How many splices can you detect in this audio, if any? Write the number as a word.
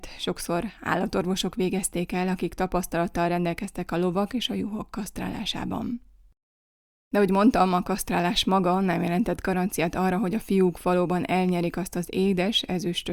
zero